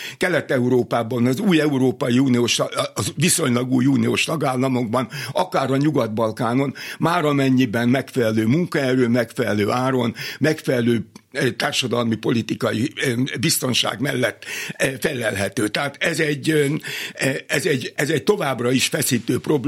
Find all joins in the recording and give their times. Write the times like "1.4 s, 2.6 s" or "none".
none